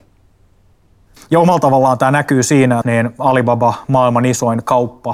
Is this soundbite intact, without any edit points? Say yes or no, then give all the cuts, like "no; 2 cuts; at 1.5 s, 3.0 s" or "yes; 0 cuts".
no; 2 cuts; at 1.2 s, 2.8 s